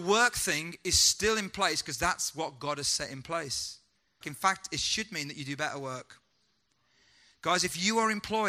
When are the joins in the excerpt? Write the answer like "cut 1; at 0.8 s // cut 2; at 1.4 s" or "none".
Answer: cut 1; at 4.2 s